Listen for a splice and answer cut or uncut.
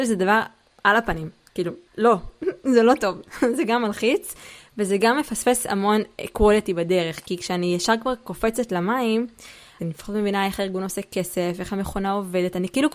cut